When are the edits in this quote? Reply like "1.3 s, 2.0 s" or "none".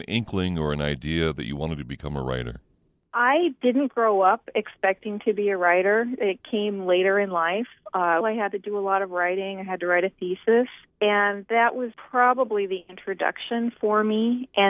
8.2 s